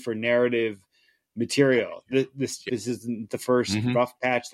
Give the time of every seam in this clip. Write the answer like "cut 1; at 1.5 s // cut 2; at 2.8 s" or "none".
cut 1; at 2.7 s